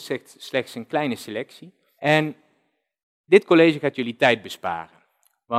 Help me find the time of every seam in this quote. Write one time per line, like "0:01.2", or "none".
none